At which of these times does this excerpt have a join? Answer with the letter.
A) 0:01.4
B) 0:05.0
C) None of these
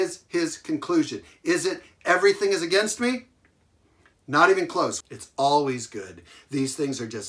B